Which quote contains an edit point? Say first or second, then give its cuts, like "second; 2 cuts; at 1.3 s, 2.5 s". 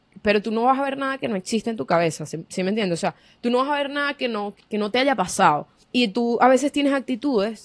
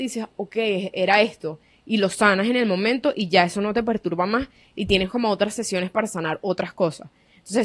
first; 2 cuts; at 4.6 s, 5.8 s